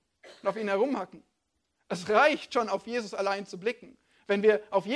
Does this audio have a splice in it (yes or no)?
no